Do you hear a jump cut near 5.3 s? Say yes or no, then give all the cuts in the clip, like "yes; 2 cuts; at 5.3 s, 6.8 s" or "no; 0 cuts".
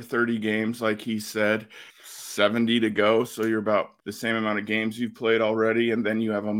no; 2 cuts; at 1.9 s, 4.0 s